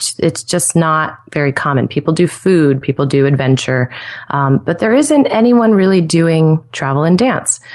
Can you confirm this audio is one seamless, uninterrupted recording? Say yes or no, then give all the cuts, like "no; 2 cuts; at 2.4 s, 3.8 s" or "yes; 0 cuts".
no; 1 cut; at 2.8 s